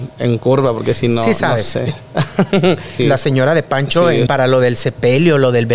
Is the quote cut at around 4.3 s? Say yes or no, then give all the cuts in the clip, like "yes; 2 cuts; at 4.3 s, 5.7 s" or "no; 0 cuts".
yes; 2 cuts; at 3.0 s, 4.3 s